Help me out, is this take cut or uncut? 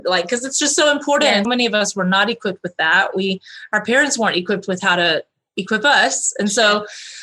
cut